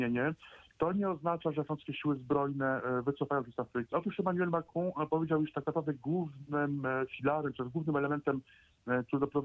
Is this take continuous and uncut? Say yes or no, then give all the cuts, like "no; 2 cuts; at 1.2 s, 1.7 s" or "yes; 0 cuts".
no; 1 cut; at 3.9 s